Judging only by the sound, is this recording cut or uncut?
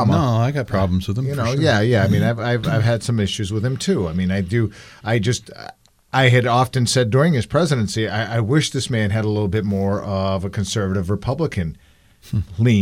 uncut